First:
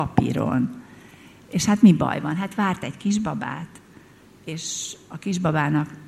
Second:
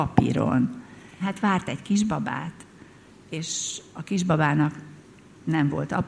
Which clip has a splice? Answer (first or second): second